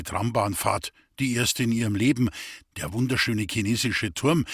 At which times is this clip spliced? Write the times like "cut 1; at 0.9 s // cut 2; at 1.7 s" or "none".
cut 1; at 2.6 s